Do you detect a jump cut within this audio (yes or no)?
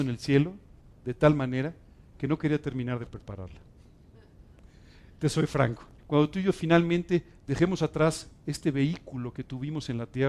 yes